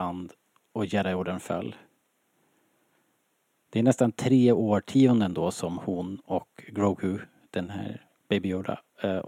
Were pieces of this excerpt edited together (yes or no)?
no